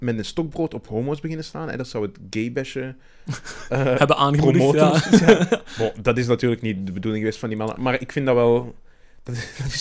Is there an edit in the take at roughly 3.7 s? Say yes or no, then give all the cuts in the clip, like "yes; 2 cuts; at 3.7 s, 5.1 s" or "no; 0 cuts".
no; 0 cuts